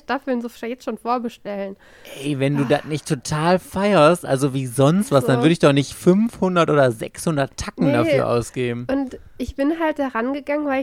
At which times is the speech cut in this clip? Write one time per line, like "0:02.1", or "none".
none